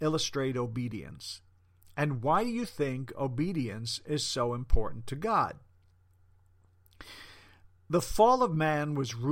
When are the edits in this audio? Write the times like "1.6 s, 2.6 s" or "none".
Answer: none